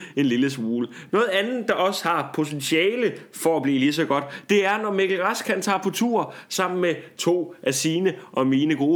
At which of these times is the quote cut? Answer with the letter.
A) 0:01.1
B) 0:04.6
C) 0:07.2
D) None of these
A